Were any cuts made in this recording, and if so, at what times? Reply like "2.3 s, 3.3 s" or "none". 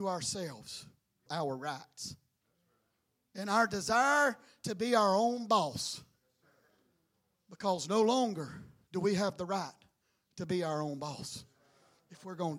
1.3 s

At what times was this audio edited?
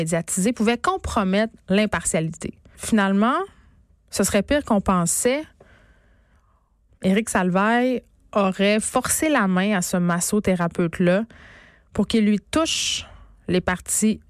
2.7 s, 6.9 s

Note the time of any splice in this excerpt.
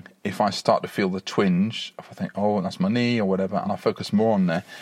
none

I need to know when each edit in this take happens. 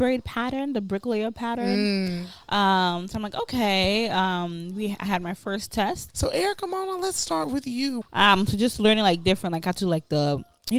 6.1 s, 8.0 s

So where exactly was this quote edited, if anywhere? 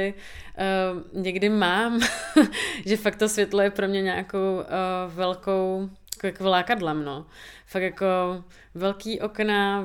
none

